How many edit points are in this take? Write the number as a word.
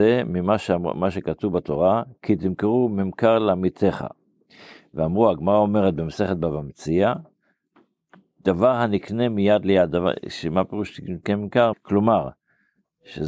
one